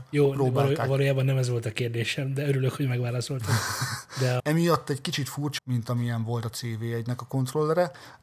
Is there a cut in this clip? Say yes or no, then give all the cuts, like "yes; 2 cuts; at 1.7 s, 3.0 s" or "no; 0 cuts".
yes; 2 cuts; at 4.4 s, 5.6 s